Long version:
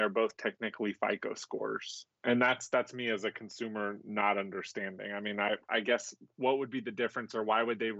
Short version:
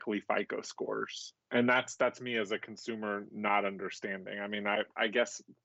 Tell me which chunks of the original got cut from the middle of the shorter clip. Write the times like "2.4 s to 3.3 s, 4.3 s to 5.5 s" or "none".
none